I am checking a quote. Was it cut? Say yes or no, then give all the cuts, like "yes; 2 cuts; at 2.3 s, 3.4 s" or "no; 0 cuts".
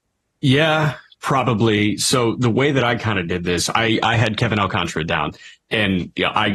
no; 0 cuts